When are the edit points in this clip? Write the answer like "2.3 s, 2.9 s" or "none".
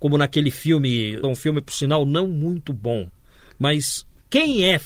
1.2 s